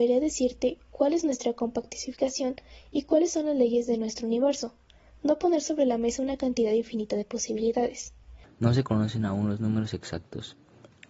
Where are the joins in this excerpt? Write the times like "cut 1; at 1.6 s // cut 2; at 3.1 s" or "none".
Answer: cut 1; at 8.4 s